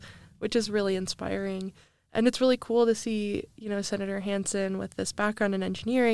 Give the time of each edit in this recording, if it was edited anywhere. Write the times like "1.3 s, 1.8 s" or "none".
none

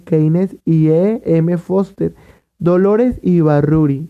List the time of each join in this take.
2.4 s

